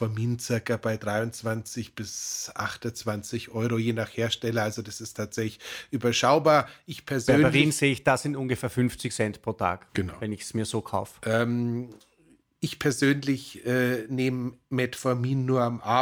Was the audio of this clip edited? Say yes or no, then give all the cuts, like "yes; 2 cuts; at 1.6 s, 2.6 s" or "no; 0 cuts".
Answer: no; 0 cuts